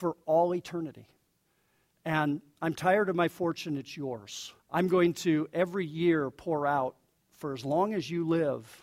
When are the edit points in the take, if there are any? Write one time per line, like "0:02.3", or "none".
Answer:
0:01.9
0:04.6